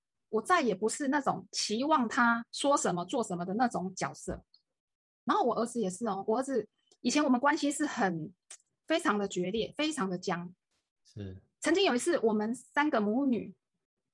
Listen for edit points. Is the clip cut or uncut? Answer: uncut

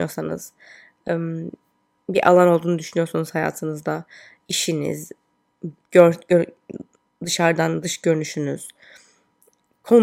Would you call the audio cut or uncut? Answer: uncut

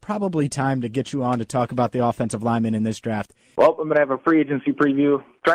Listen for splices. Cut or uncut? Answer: cut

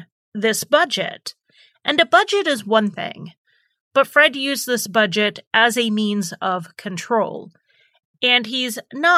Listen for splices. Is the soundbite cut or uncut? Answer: uncut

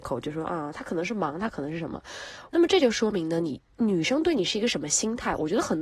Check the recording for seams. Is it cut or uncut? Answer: cut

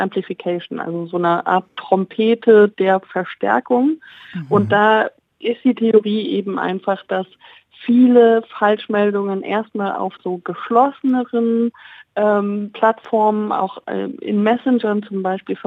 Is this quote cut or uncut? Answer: uncut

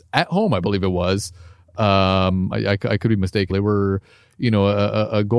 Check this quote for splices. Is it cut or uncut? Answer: cut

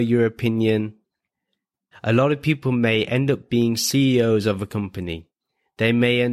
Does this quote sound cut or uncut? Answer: cut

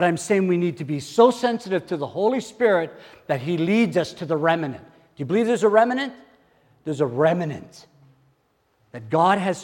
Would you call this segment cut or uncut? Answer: uncut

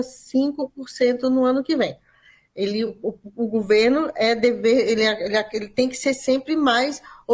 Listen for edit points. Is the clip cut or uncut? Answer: uncut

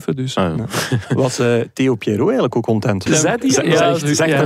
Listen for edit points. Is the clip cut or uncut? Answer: cut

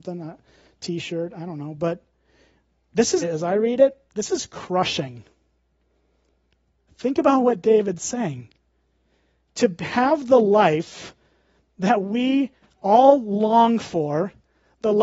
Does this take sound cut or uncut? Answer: cut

